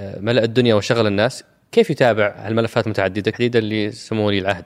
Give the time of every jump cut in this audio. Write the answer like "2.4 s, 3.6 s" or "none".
3.3 s